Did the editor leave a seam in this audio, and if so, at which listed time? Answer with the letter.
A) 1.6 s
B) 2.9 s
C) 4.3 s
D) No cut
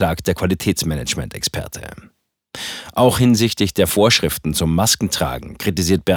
D